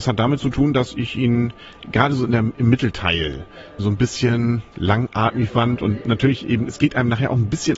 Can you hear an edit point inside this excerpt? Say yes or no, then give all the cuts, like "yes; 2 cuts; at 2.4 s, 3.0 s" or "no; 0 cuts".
yes; 1 cut; at 3.8 s